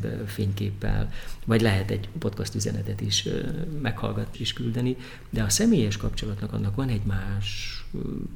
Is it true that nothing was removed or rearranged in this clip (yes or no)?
no